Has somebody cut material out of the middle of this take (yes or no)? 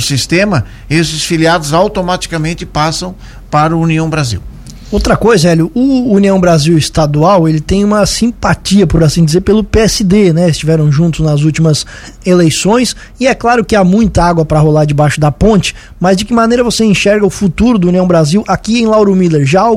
no